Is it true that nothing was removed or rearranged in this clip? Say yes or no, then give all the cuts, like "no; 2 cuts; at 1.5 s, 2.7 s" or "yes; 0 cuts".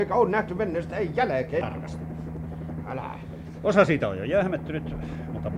no; 2 cuts; at 1.6 s, 2.8 s